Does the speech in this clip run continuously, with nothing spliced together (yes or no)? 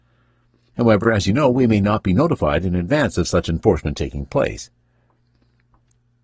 yes